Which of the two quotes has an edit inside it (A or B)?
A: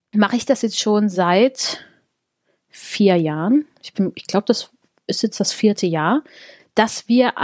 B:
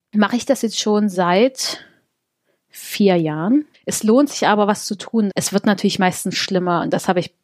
B